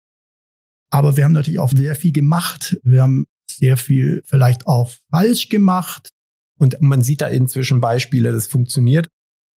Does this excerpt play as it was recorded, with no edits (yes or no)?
no